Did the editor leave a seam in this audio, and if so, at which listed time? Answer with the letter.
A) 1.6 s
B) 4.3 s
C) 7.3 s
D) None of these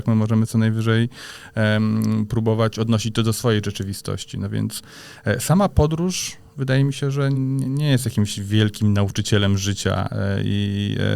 C